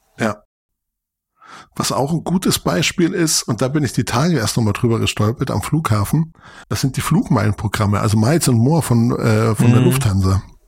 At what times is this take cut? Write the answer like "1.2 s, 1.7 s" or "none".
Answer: 6.6 s

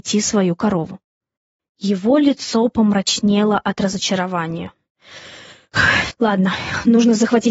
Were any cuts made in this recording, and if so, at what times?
6.1 s

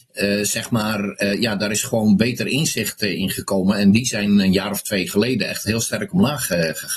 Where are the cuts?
none

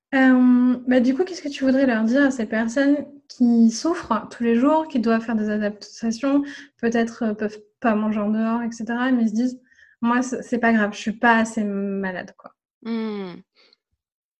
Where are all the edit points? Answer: none

